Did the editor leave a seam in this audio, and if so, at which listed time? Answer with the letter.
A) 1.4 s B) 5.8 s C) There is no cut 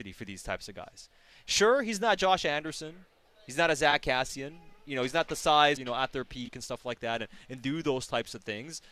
B